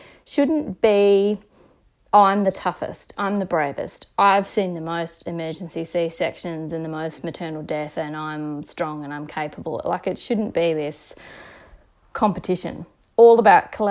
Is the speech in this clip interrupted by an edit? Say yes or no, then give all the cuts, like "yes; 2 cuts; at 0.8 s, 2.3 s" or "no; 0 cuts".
no; 0 cuts